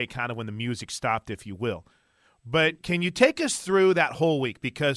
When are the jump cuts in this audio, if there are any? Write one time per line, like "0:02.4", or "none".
0:02.8